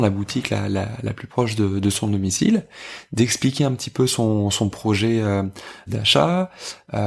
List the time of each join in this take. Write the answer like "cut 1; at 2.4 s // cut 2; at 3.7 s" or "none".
cut 1; at 5.9 s